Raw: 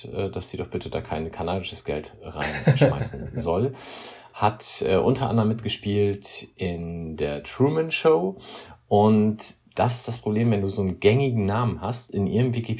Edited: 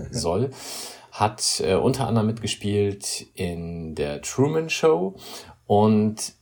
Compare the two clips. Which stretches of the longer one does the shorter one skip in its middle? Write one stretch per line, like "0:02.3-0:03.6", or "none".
none